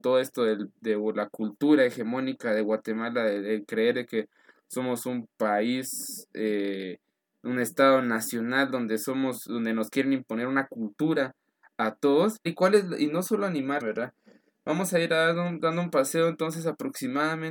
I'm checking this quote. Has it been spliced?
yes; 2 cuts; at 12.5 s, 13.8 s

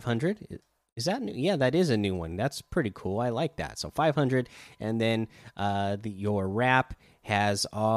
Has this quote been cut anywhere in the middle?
no; 0 cuts

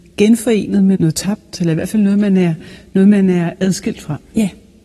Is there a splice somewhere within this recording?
yes; 1 cut; at 0.9 s

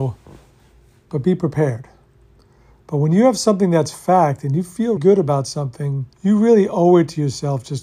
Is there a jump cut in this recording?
yes; 2 cuts; at 5.0 s, 6.1 s

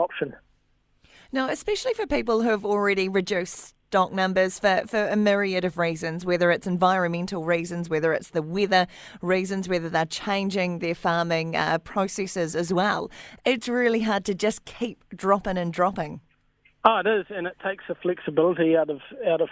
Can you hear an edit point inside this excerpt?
no; 0 cuts

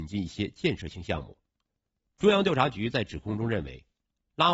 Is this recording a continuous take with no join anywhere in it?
no; 1 cut; at 2.1 s

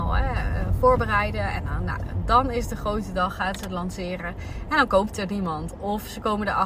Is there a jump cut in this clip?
no; 0 cuts

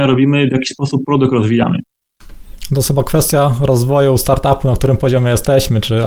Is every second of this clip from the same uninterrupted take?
yes; 0 cuts

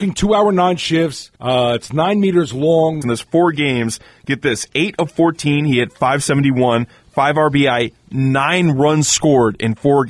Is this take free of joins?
no; 2 cuts; at 1.4 s, 3.0 s

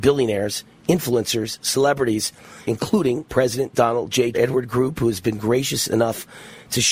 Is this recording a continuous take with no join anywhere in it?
no; 2 cuts; at 2.6 s, 4.3 s

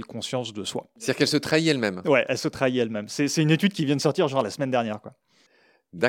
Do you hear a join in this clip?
yes; 1 cut; at 1.0 s

